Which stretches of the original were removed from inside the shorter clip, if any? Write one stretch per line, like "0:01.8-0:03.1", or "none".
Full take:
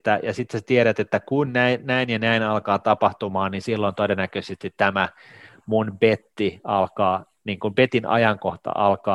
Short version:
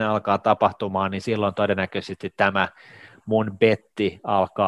none